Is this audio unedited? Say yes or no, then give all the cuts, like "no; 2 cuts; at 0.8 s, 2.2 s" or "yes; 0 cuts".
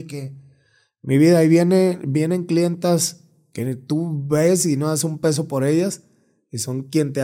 yes; 0 cuts